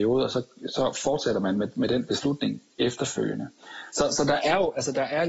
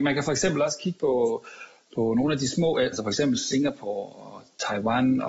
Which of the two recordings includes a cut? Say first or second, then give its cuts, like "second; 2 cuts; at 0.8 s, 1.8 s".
second; 1 cut; at 2.9 s